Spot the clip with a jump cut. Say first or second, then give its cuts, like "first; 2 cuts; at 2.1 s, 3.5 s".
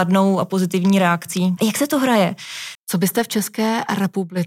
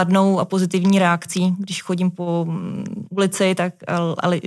first; 2 cuts; at 1.6 s, 2.7 s